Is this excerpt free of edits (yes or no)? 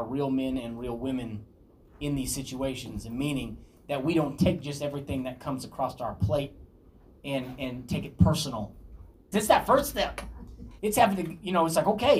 no